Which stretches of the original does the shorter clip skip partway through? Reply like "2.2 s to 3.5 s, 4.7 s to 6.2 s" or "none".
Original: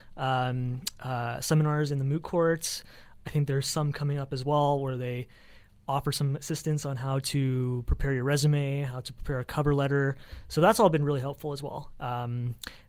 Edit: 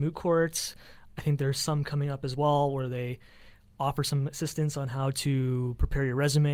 none